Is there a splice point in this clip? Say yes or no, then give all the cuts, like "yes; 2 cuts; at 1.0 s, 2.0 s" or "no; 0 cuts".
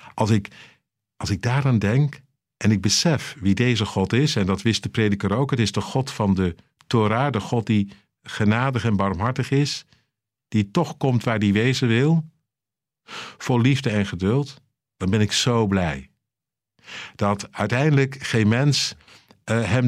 no; 0 cuts